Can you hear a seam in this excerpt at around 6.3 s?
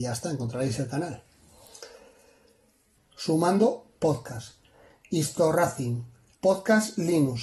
yes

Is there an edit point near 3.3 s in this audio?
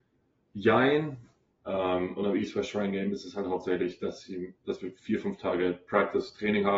no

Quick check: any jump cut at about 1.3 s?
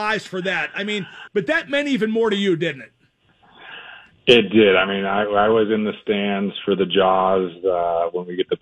yes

